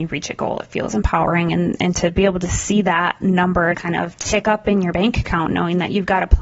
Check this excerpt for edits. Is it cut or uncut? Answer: cut